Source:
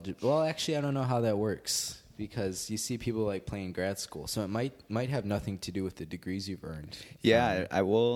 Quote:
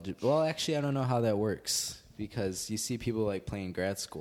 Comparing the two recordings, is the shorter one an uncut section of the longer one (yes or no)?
yes